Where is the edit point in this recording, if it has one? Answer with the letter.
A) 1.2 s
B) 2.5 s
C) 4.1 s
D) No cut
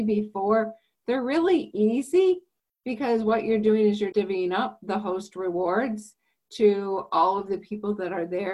C